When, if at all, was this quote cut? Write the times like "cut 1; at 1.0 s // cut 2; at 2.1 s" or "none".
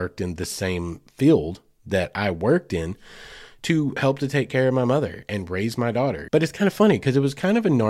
cut 1; at 6.3 s